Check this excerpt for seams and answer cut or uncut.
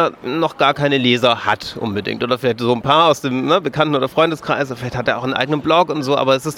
uncut